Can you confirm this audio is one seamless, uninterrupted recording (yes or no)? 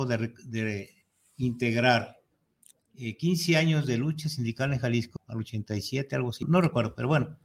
no